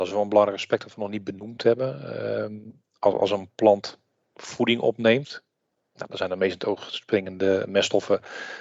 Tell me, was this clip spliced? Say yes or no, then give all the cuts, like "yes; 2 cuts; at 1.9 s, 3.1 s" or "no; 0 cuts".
no; 0 cuts